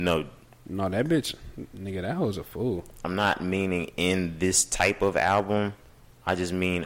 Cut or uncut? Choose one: uncut